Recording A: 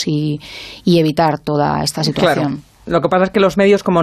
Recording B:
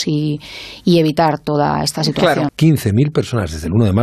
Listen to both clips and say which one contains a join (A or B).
B